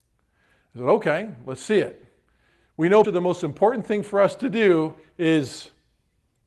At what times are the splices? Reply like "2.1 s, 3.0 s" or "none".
3.0 s